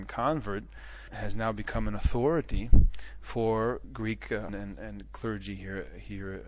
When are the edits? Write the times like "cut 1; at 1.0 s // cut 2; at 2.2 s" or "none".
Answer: cut 1; at 4.5 s